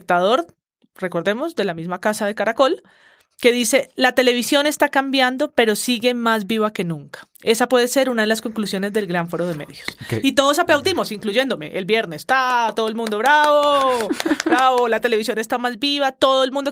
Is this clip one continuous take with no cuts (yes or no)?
yes